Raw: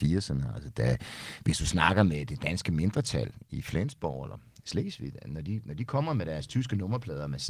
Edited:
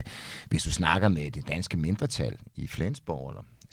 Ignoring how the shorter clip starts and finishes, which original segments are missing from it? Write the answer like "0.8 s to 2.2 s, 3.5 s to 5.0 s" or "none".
none